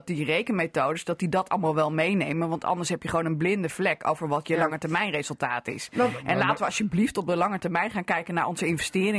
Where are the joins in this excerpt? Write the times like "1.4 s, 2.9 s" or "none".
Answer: none